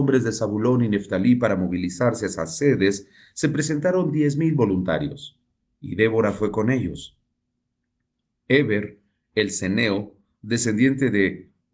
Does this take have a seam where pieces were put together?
no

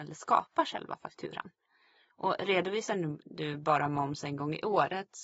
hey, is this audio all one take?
yes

